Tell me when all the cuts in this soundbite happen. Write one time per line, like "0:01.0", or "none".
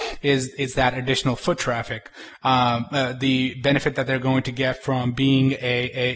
none